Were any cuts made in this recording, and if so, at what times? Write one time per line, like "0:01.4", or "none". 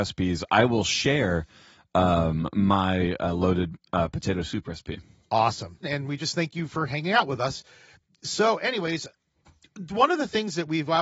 0:05.8